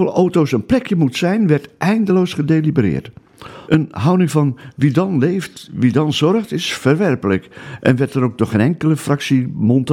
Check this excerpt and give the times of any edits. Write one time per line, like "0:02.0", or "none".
0:03.7